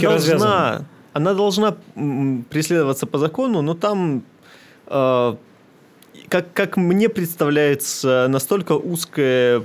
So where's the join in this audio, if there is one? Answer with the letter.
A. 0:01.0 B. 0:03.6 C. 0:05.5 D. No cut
D